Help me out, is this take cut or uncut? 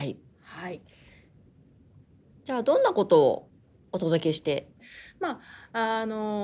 cut